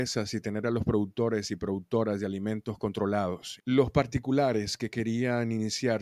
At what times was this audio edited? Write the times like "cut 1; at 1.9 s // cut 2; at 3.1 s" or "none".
cut 1; at 3.6 s